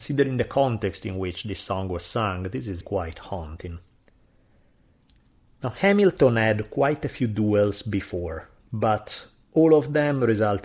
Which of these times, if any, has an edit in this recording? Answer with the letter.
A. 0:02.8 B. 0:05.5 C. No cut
A